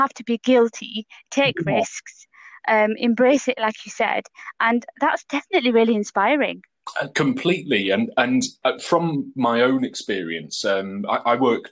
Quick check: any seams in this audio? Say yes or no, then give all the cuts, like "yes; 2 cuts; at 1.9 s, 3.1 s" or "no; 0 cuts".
no; 0 cuts